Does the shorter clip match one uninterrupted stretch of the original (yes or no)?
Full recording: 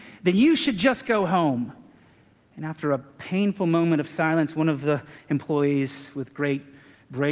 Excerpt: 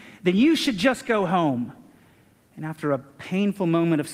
yes